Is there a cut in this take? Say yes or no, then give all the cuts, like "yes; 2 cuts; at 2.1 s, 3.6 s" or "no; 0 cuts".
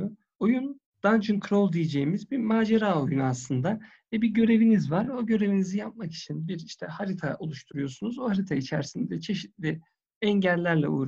no; 0 cuts